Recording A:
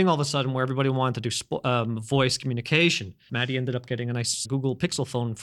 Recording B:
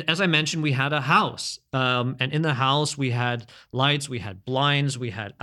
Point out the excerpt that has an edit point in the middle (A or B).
A